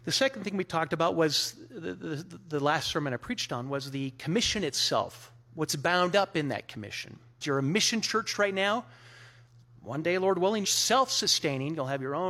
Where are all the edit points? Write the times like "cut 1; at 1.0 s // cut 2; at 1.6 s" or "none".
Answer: cut 1; at 7.4 s // cut 2; at 10.6 s